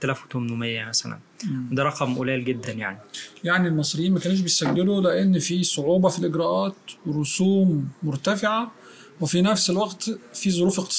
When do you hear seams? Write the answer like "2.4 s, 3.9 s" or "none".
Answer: none